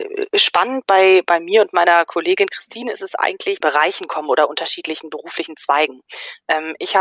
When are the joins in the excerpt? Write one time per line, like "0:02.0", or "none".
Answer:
0:03.6